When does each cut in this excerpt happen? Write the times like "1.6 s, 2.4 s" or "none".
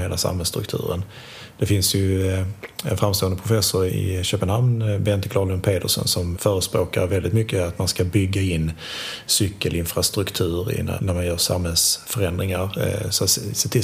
3.9 s, 6.3 s, 11.0 s